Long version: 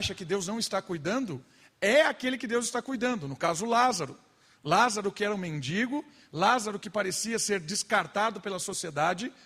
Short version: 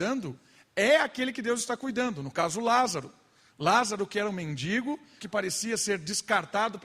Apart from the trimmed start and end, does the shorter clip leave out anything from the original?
yes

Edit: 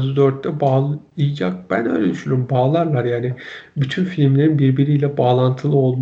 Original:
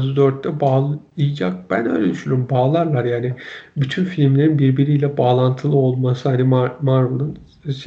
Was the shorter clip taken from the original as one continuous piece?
yes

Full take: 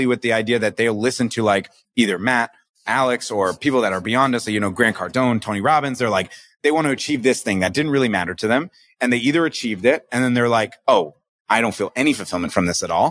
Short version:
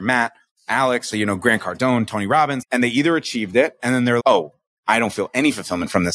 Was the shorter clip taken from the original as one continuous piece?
no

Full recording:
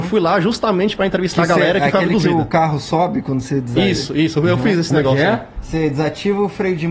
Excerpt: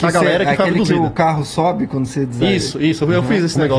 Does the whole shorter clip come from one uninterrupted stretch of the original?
yes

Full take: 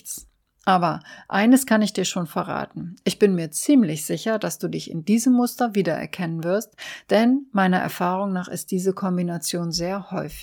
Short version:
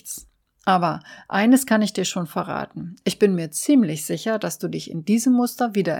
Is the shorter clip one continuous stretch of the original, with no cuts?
yes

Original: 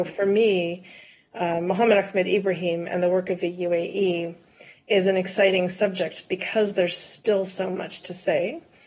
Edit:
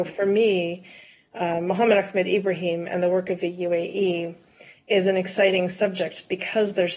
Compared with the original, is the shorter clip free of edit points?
yes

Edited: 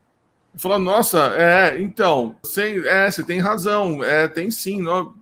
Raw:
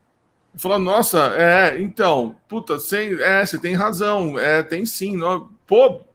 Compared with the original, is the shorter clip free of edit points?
no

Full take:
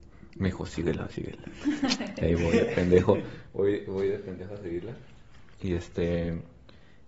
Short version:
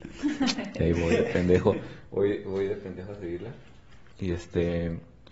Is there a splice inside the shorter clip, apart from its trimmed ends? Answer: no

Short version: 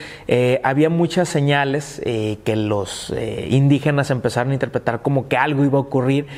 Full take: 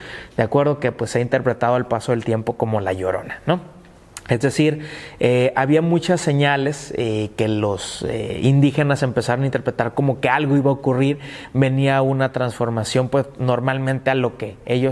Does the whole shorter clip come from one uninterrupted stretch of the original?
yes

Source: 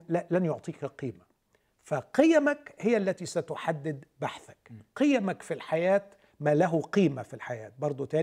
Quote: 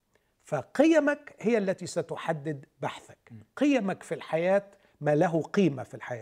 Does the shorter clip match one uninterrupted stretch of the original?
yes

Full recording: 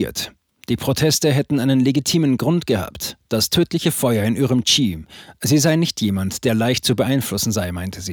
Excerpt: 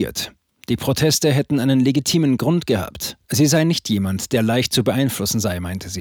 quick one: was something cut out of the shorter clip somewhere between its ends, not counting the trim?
yes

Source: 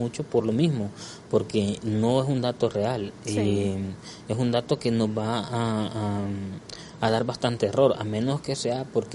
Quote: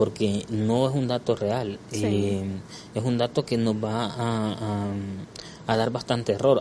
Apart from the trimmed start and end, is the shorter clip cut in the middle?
no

